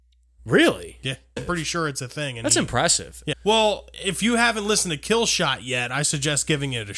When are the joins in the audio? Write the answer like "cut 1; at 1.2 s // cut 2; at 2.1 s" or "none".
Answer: cut 1; at 1.4 s // cut 2; at 3.3 s

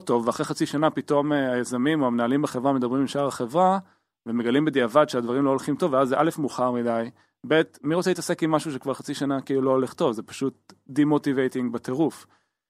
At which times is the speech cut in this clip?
none

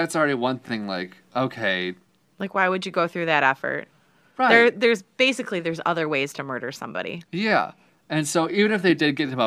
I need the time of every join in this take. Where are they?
none

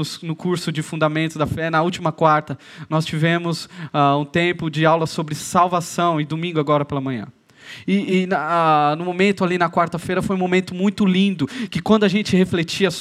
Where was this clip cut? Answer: none

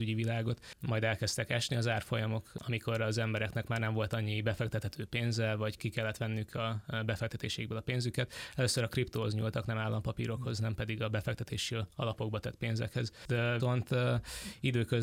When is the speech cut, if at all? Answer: cut 1; at 5.8 s // cut 2; at 13.6 s

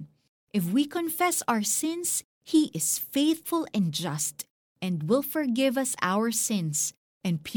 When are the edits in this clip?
none

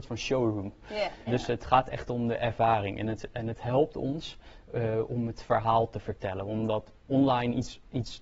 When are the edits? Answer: cut 1; at 1.3 s

